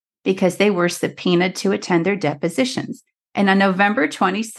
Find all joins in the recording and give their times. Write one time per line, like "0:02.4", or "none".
0:03.2